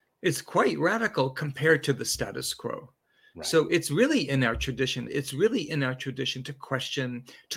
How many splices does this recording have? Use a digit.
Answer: 1